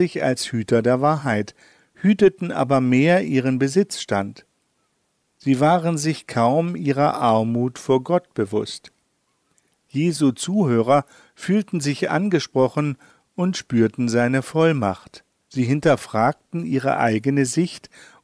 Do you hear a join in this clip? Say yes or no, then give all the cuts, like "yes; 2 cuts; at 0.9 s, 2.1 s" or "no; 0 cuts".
yes; 1 cut; at 15.4 s